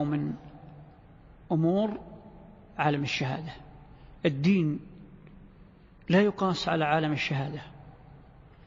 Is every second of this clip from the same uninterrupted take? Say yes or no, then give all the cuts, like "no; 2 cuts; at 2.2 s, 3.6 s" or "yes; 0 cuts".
yes; 0 cuts